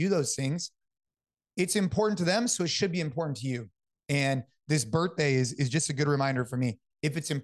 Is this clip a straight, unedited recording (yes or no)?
yes